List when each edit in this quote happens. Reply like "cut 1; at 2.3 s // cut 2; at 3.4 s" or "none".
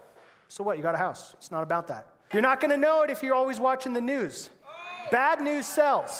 cut 1; at 2.3 s